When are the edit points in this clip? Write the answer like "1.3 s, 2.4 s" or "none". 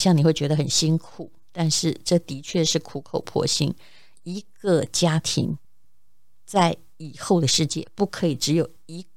none

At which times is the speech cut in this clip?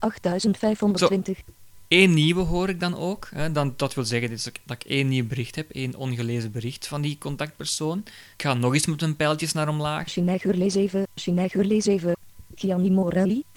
8.3 s

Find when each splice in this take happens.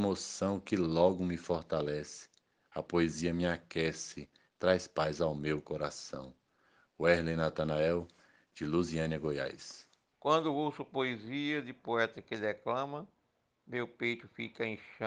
10.1 s

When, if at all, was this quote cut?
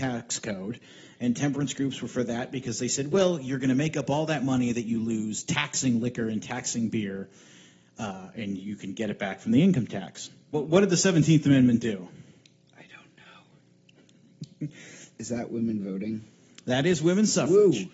10.5 s, 15.1 s

